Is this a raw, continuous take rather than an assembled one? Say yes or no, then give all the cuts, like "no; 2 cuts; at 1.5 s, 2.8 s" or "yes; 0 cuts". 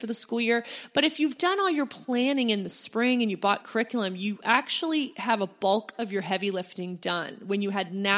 yes; 0 cuts